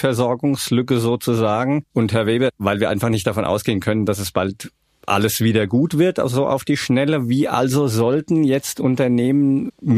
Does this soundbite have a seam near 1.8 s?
no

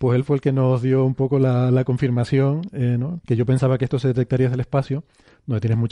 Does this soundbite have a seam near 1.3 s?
no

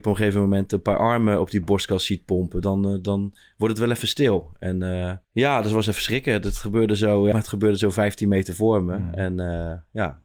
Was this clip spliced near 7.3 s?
yes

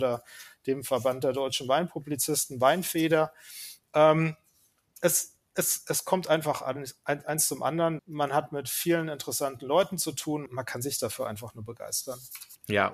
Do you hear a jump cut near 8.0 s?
yes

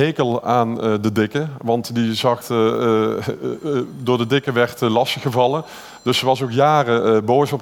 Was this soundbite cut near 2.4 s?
yes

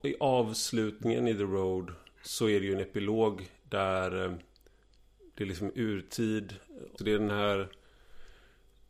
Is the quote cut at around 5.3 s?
no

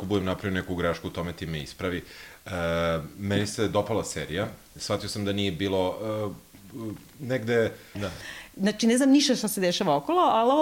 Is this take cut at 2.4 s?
no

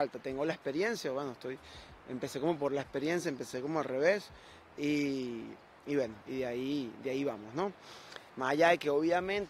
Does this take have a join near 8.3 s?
yes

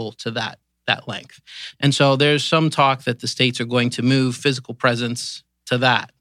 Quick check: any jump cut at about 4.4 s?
no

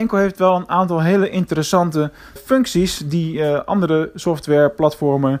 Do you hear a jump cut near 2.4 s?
yes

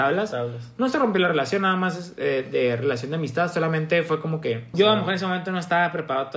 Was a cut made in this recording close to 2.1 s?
no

